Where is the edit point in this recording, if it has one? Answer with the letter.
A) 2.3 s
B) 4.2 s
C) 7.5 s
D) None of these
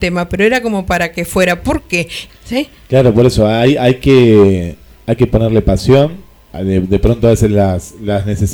A